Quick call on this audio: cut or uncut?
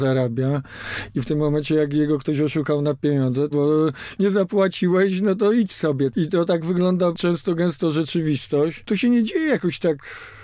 cut